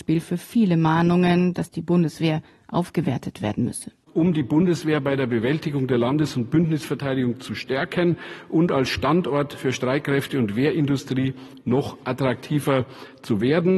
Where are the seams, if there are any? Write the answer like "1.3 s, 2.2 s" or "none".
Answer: 4.0 s